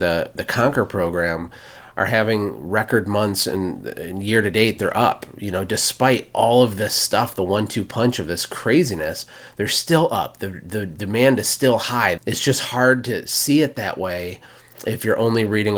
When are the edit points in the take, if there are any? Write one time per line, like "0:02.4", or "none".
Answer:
0:12.2